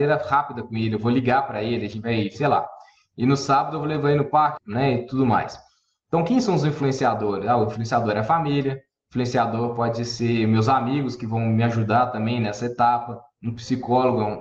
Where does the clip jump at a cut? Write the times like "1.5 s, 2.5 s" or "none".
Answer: 4.6 s